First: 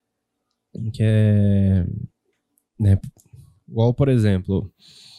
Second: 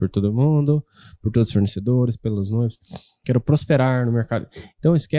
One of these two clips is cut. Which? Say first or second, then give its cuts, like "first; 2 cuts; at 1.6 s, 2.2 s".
second; 1 cut; at 3.2 s